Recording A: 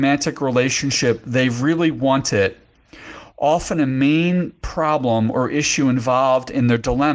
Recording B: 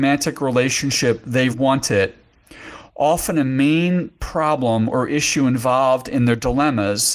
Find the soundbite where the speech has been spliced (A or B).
B